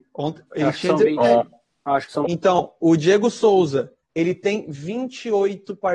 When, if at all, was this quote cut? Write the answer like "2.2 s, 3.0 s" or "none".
2.2 s, 4.0 s